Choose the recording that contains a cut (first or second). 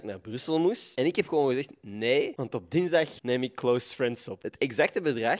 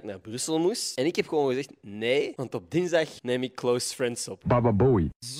second